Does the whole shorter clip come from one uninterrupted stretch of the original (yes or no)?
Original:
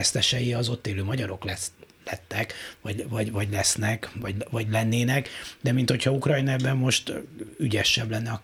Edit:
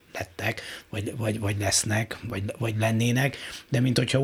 yes